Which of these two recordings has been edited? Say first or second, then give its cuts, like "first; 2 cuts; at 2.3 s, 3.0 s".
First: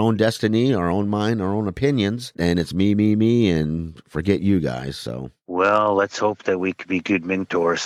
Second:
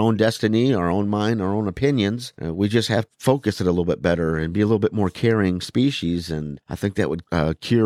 first; 1 cut; at 2.3 s